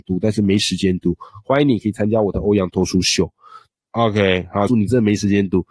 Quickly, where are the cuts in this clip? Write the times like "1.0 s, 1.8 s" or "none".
3.7 s, 4.7 s